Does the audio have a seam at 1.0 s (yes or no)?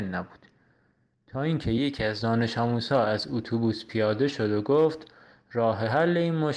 no